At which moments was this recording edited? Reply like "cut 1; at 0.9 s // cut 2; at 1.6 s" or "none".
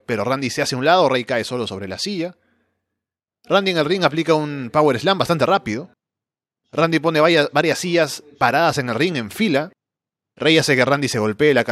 none